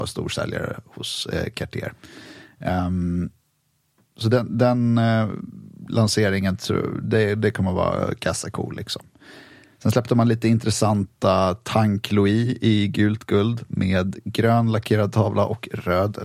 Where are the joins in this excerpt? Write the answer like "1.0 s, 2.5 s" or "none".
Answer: none